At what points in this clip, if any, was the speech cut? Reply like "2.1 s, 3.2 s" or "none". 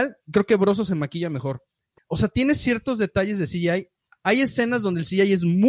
2.0 s